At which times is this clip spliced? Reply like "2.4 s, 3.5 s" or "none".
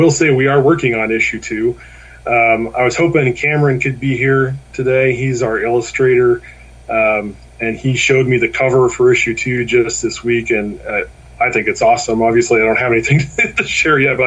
none